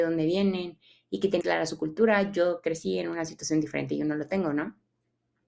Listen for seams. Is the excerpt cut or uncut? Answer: cut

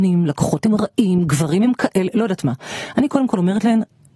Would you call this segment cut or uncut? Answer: uncut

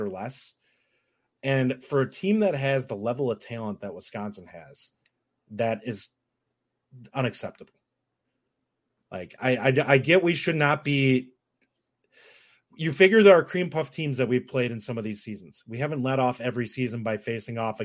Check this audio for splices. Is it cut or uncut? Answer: uncut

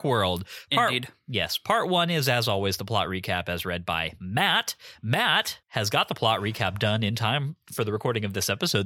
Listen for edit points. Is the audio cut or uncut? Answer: cut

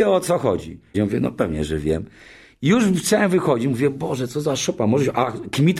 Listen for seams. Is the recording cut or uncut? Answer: cut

